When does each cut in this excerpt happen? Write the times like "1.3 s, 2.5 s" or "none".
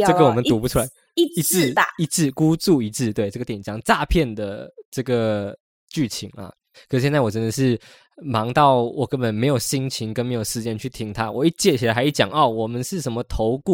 6.7 s